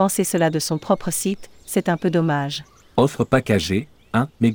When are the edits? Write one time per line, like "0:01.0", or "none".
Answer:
0:02.8